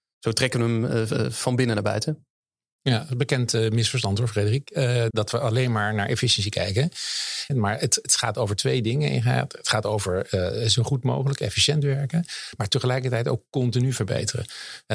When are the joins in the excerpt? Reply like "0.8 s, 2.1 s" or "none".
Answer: 5.1 s, 7.5 s